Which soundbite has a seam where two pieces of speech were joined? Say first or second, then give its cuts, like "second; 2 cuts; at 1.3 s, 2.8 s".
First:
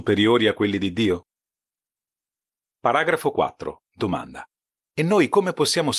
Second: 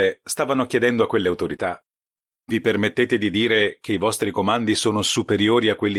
first; 1 cut; at 4.8 s